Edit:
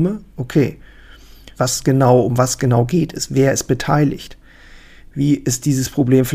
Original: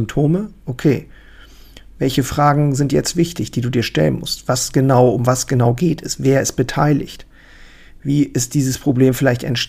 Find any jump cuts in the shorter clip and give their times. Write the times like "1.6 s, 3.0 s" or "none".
1.5 s